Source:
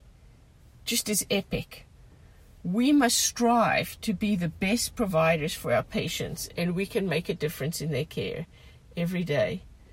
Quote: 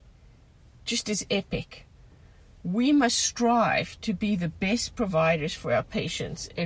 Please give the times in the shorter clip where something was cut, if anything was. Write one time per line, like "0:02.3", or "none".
none